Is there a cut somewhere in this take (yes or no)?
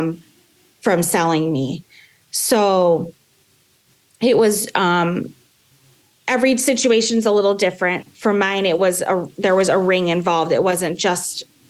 no